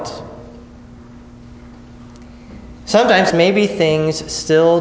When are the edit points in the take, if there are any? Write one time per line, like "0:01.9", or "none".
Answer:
0:03.3